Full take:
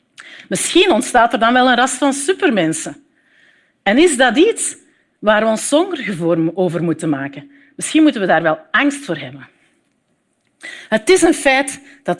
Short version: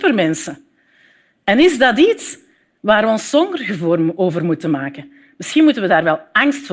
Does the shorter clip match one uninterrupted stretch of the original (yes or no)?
yes